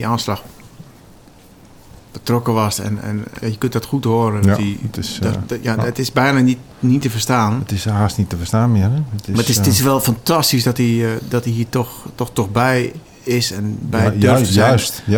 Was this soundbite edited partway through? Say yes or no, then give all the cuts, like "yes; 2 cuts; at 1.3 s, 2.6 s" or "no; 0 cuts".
yes; 1 cut; at 3.4 s